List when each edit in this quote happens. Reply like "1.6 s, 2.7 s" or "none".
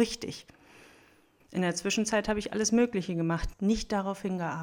1.4 s, 3.5 s